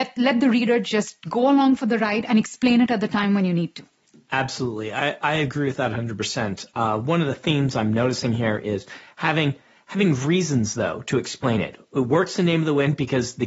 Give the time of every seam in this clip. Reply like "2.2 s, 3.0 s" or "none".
none